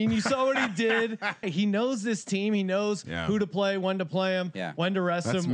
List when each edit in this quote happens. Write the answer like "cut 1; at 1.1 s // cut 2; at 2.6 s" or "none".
cut 1; at 1.4 s